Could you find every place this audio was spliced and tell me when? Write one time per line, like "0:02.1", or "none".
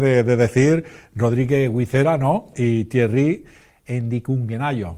0:02.5